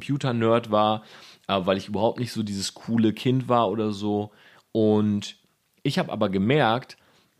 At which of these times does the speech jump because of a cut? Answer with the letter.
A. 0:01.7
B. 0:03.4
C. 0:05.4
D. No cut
D